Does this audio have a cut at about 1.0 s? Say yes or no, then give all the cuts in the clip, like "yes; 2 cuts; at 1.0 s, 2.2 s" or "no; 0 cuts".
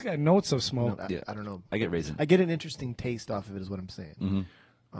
yes; 1 cut; at 1.0 s